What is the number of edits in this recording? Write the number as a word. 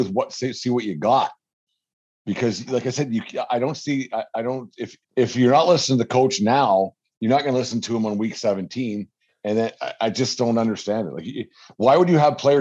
one